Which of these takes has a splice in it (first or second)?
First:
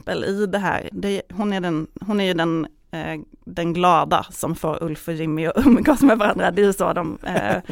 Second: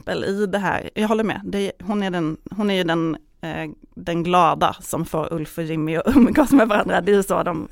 first